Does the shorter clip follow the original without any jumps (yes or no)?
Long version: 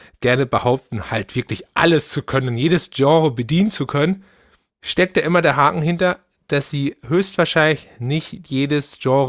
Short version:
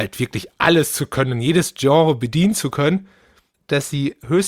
no